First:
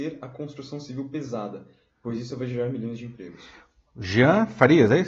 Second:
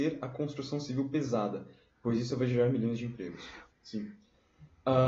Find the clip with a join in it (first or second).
second